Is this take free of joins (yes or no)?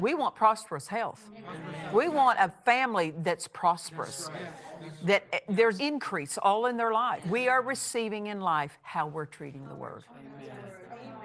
no